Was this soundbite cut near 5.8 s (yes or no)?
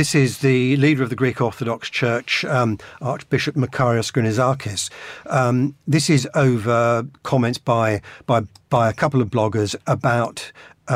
no